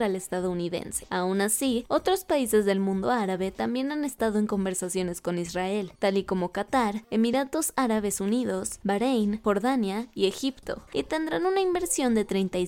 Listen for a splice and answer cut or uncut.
cut